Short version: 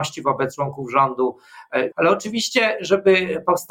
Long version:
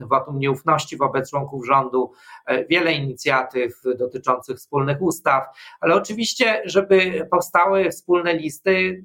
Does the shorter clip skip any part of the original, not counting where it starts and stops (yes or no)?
yes